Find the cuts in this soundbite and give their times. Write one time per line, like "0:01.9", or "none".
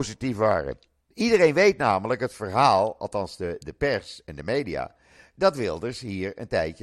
0:01.1